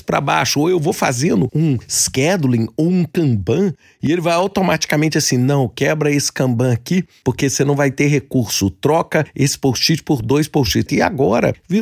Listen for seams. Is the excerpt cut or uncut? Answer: cut